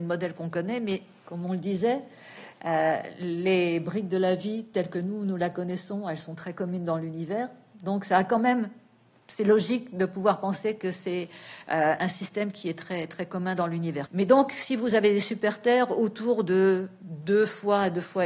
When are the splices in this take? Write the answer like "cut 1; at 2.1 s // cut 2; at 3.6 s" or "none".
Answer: cut 1; at 12.0 s // cut 2; at 14.1 s